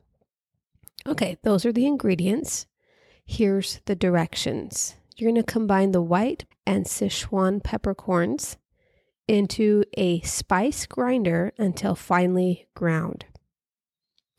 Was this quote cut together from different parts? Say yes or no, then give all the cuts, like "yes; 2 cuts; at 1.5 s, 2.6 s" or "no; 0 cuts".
yes; 1 cut; at 6.5 s